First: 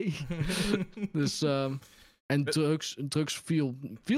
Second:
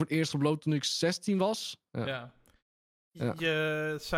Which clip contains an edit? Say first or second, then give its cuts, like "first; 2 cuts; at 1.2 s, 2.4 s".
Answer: second; 1 cut; at 1.9 s